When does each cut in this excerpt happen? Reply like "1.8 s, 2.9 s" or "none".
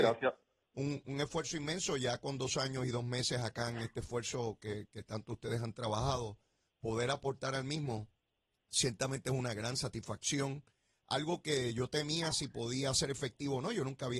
none